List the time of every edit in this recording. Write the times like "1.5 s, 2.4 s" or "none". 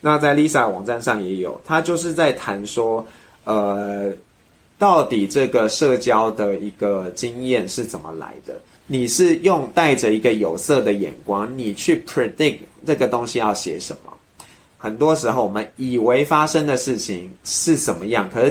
8.8 s, 14.8 s